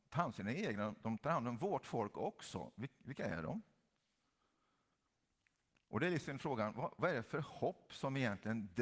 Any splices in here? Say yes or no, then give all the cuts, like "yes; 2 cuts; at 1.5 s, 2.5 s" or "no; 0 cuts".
no; 0 cuts